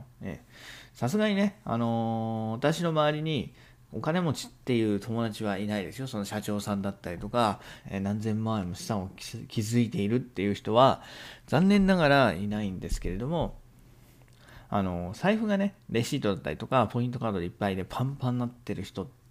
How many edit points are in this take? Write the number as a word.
two